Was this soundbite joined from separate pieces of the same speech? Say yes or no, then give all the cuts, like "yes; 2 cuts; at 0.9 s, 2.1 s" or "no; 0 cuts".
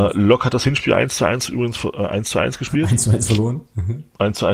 no; 0 cuts